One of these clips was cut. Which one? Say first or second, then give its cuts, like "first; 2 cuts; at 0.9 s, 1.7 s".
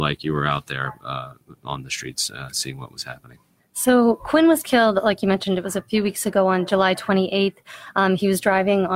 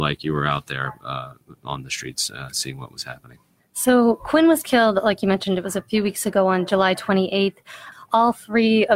second; 1 cut; at 7.9 s